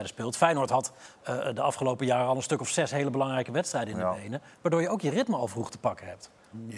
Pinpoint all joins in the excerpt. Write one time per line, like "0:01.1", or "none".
none